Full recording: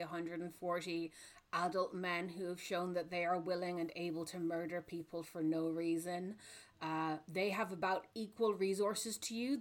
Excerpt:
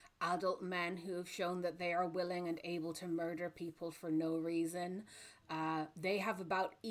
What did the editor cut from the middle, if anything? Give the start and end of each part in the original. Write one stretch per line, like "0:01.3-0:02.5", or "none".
none

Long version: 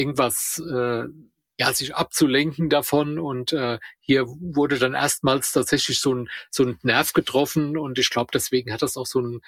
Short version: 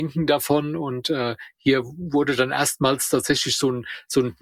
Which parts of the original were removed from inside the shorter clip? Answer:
none

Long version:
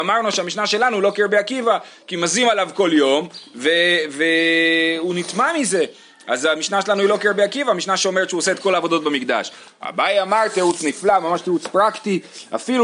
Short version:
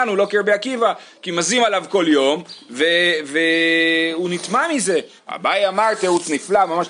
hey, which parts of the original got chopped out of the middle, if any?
0:06.0-0:09.7

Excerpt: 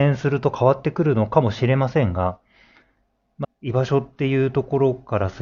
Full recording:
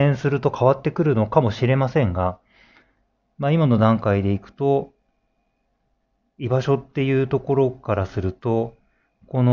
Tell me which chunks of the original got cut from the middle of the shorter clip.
0:03.4-0:06.2

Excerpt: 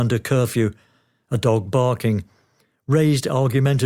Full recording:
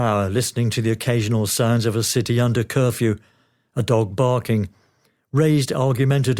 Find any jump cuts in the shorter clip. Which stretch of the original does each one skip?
none

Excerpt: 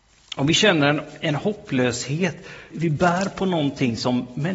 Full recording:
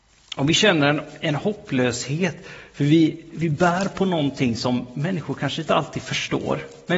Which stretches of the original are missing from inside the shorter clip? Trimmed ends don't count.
0:02.7-0:03.3

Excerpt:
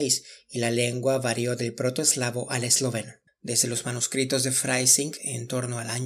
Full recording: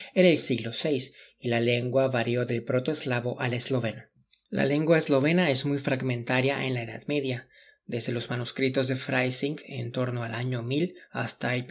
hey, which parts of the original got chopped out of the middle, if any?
0:04.2-0:07.7

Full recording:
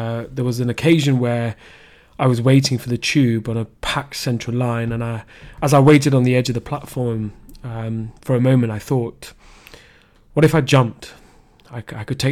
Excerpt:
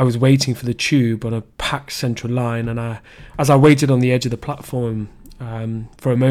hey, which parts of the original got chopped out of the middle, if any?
none

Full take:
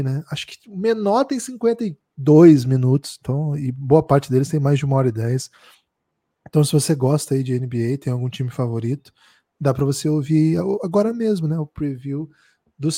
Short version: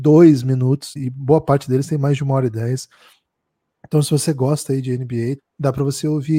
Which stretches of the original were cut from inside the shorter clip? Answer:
0:03.2-0:03.6
0:08.0-0:09.4

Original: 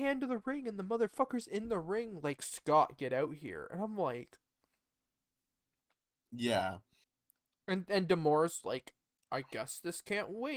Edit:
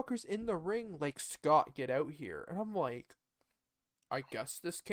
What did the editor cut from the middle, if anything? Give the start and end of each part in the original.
0:05.2-0:09.1

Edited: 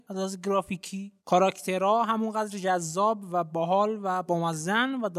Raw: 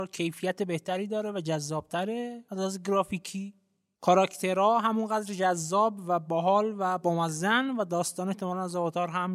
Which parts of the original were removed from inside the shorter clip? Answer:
0:03.6-0:03.9

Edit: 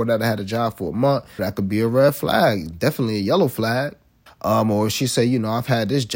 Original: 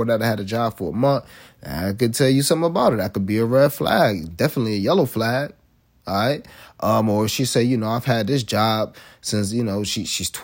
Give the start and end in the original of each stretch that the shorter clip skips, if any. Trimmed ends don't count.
0:01.4-0:03.0
0:05.8-0:06.6

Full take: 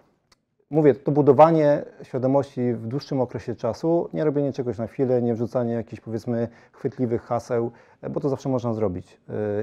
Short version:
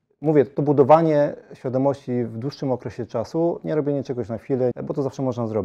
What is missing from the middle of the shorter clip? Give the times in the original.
0:05.2-0:08.0

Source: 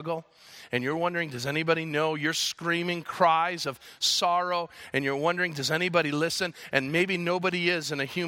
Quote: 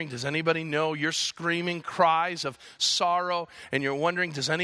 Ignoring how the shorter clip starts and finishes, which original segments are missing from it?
none

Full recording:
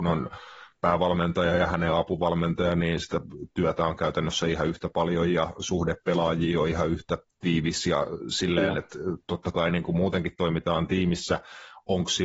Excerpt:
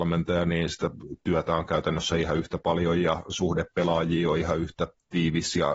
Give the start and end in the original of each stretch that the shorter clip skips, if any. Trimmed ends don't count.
none

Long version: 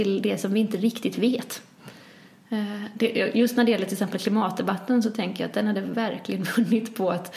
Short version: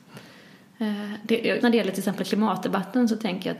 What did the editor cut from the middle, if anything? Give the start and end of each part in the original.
0:03.3-0:03.5

